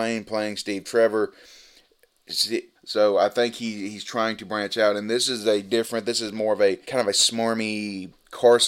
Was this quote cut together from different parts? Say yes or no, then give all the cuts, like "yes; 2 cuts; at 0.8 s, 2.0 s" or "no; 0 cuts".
yes; 2 cuts; at 2.7 s, 6.8 s